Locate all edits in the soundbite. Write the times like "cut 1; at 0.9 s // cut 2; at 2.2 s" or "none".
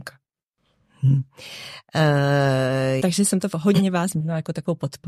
cut 1; at 3.0 s